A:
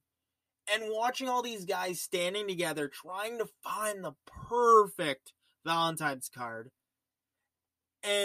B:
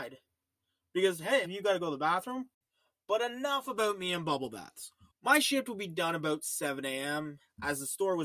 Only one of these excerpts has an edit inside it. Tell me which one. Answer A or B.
B